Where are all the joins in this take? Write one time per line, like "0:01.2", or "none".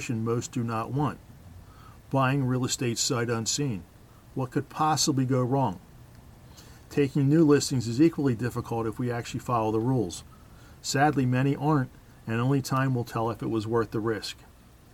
none

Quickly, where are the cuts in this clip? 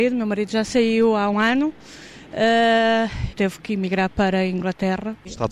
0:01.3
0:03.3

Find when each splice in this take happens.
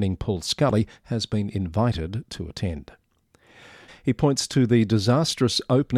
0:03.9

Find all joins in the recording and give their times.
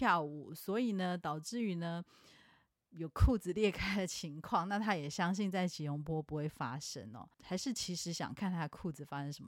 0:07.3

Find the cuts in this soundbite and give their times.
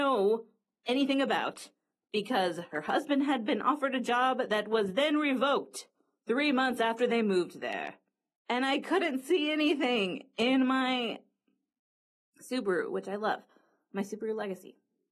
0:08.4

